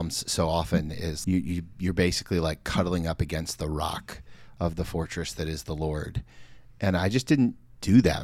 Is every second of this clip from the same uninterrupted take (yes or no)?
no